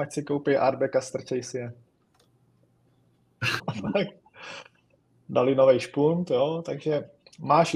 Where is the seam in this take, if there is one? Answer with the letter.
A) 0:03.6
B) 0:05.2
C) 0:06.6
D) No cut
A